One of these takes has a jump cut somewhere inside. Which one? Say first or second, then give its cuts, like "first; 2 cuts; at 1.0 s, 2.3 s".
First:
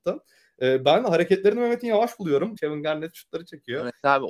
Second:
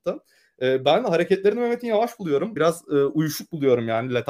first; 1 cut; at 2.6 s